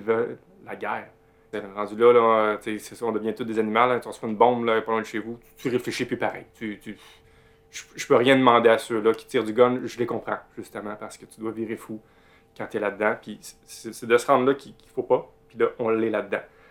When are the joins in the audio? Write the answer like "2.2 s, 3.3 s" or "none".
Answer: 1.5 s